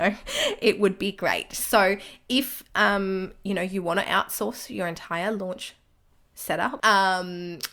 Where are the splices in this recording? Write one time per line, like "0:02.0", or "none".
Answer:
0:06.8